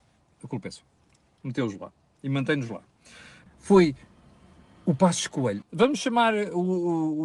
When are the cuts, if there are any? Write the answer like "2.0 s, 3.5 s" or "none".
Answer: 3.5 s, 5.6 s

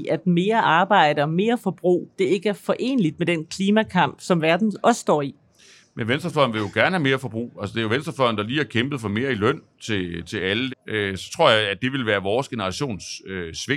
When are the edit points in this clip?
10.7 s

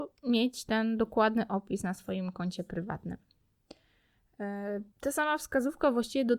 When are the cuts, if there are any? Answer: 4.9 s

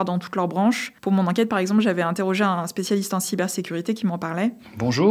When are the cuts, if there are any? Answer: 1.0 s

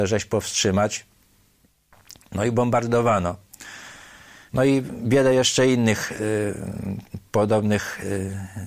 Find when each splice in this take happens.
4.5 s

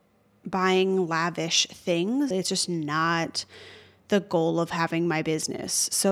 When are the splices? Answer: 2.3 s

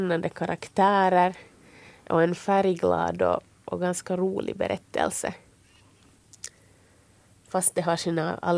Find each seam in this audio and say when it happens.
none

